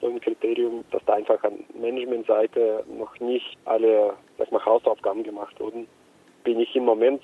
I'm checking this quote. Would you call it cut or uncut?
uncut